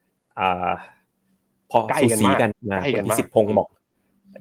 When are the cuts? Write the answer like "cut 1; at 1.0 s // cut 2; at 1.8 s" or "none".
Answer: cut 1; at 2.5 s